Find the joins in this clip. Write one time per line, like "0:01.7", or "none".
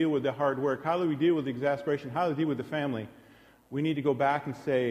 none

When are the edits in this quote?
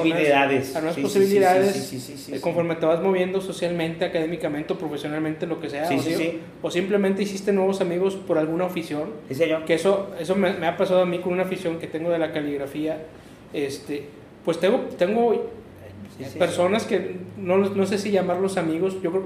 0:11.8

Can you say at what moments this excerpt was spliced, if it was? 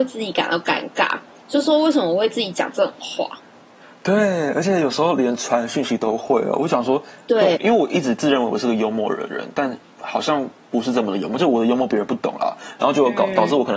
0:07.6

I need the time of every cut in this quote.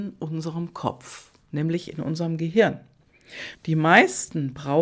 0:03.5

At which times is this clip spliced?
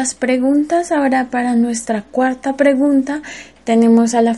none

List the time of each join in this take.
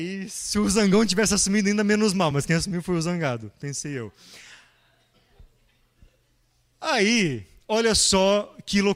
none

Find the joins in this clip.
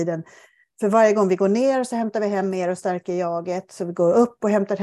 none

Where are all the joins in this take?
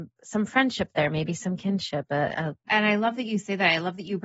0:02.7

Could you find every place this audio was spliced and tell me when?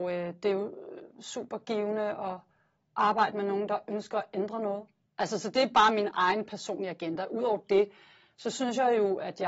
0:05.1

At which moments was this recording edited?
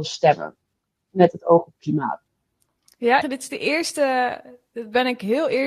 0:03.2

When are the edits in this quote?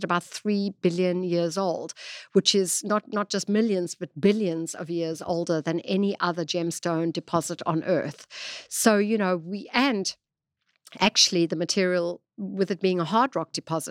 none

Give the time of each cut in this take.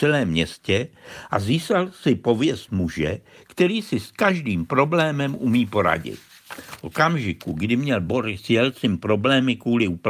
none

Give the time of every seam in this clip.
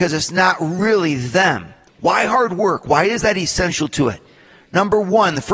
0:01.9

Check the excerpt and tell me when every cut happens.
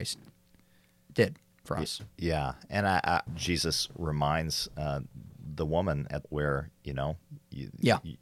0:03.3
0:06.2

